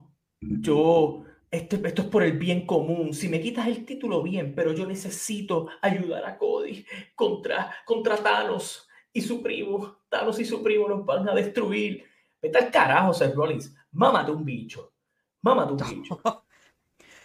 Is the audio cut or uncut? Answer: uncut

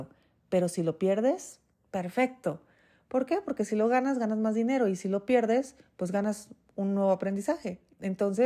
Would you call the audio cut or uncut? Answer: uncut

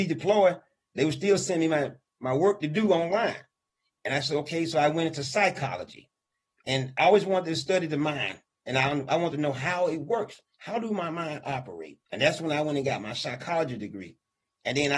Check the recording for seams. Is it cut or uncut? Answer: cut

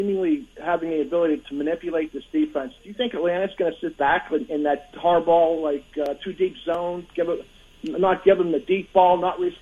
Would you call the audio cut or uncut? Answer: cut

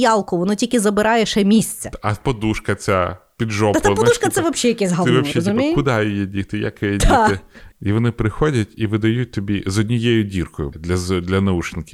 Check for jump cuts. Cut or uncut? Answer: cut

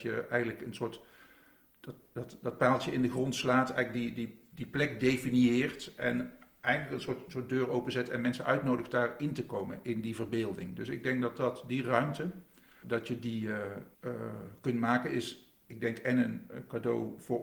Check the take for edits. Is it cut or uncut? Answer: cut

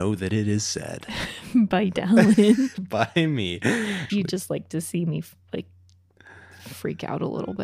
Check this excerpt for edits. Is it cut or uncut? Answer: cut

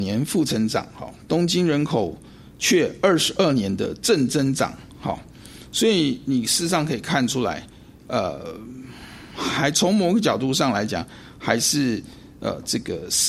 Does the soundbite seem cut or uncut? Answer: uncut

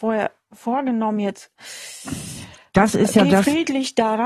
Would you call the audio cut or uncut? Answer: uncut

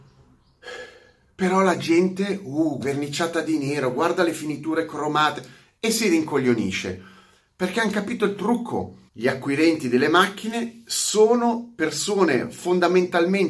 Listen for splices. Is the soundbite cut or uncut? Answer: cut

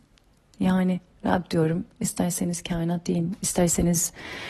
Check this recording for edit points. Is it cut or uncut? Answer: cut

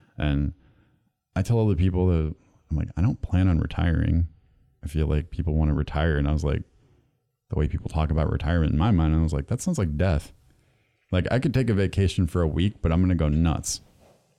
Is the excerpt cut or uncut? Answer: uncut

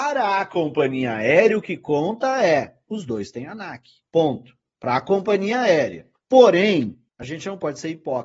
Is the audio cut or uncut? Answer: uncut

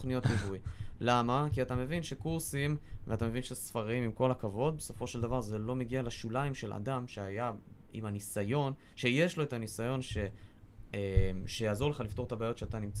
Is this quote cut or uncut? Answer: uncut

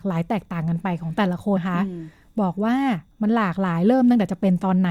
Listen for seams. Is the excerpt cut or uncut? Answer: cut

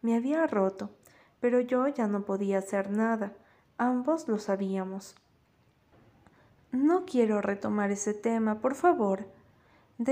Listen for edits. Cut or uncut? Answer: uncut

